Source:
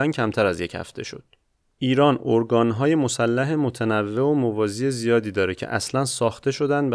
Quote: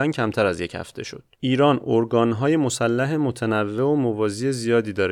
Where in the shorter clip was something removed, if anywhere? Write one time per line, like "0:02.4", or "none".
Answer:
0:01.3